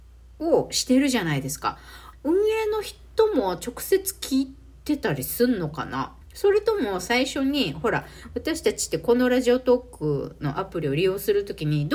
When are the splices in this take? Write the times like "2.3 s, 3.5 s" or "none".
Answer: 2.1 s, 6.2 s